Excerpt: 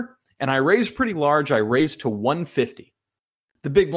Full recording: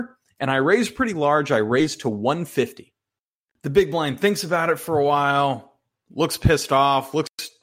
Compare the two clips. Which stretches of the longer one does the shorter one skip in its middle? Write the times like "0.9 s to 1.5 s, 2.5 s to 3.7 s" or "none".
none